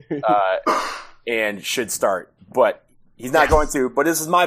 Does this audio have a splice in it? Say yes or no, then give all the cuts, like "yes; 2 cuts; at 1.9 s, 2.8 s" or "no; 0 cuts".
no; 0 cuts